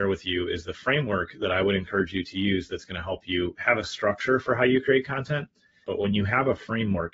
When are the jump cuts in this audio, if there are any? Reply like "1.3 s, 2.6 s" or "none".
5.8 s

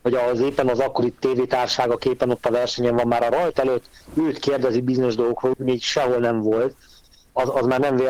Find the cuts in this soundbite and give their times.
5.5 s

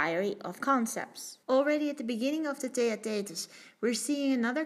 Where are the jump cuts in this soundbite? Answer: 1.4 s

